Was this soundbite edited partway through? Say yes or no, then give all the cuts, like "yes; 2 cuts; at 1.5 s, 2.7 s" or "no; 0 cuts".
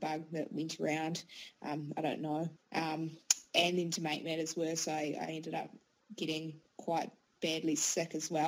yes; 1 cut; at 2.6 s